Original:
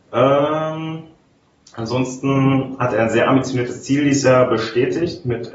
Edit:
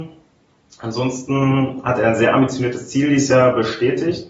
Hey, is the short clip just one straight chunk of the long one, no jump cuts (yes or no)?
yes